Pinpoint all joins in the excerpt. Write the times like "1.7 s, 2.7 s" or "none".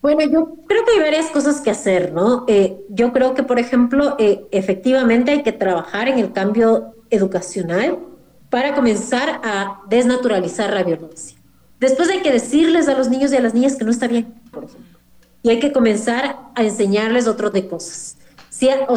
14.5 s, 17.5 s